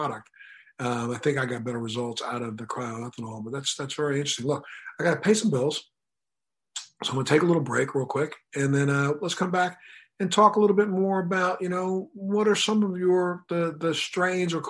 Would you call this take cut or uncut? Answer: uncut